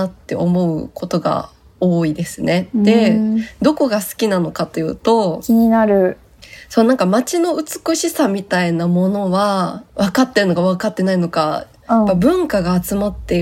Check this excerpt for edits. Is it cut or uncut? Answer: cut